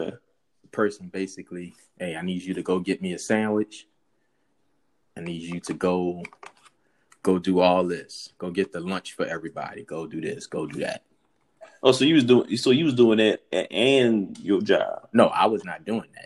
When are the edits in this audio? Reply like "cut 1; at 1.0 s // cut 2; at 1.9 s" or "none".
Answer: none